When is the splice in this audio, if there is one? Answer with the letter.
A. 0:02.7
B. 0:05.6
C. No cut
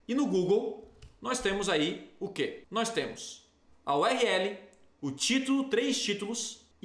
C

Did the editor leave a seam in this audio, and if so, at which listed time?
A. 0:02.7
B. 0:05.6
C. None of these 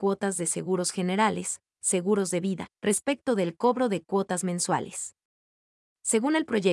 A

